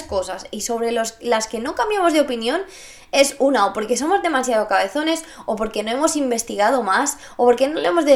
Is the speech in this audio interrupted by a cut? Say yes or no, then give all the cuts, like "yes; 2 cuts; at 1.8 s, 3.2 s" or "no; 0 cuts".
no; 0 cuts